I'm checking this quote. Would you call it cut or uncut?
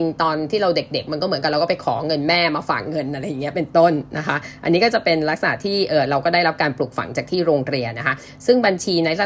uncut